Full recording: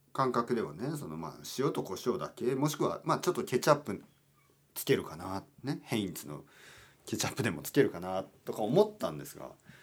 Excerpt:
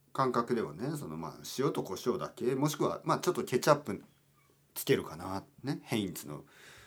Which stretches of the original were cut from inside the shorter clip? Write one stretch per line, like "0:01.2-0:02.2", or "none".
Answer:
none